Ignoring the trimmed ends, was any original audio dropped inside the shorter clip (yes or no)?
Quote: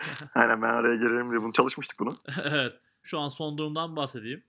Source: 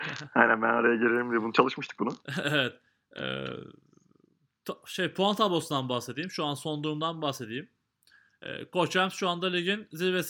yes